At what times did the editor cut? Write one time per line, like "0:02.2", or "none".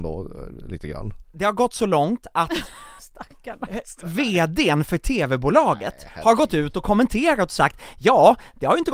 0:01.2
0:03.0